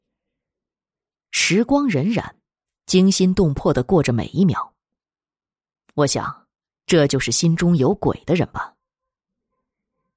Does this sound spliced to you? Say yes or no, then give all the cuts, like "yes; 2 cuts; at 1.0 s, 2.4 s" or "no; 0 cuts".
no; 0 cuts